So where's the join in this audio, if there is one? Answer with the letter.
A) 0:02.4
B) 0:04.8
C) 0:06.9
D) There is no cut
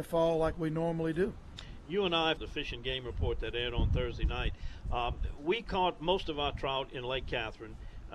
A